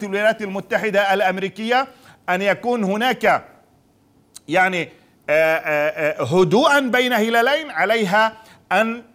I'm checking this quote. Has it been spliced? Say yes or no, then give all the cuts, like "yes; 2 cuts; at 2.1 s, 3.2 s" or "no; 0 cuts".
no; 0 cuts